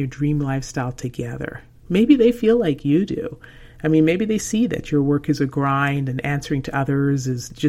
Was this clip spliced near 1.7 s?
no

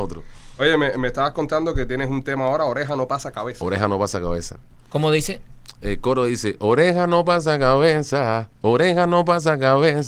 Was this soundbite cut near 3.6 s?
no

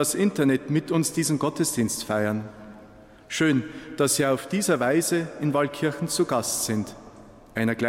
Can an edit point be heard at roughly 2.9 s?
no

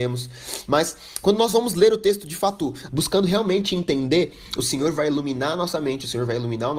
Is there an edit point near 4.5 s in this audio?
no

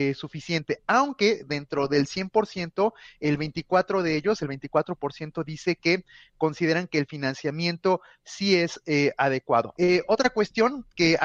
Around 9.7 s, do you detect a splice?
yes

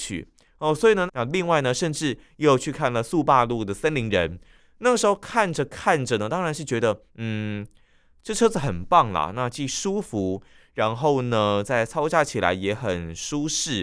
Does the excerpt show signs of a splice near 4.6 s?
yes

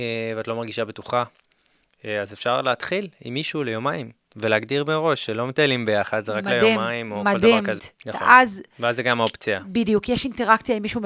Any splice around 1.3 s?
no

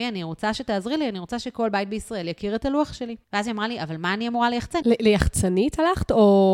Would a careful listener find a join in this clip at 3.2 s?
yes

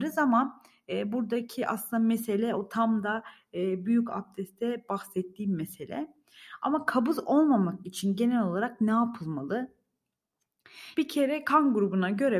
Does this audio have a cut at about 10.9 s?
yes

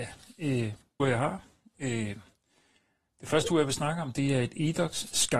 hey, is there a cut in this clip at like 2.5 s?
no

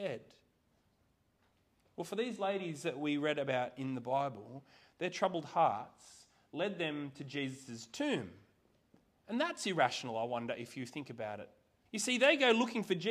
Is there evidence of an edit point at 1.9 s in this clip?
no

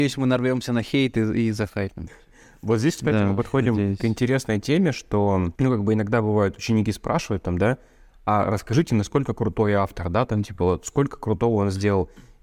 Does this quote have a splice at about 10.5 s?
no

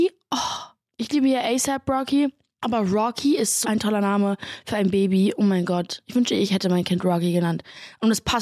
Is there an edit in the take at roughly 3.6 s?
yes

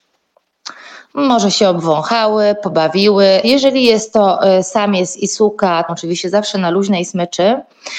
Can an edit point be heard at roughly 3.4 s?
yes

